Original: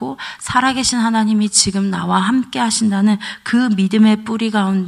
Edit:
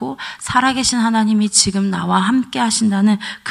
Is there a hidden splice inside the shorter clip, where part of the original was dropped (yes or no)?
no